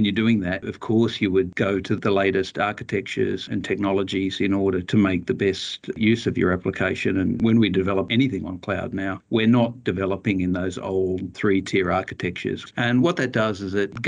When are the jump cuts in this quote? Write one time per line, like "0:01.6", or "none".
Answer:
0:12.7